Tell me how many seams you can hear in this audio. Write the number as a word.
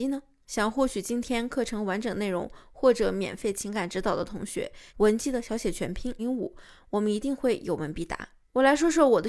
two